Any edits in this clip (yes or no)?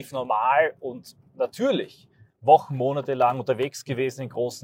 yes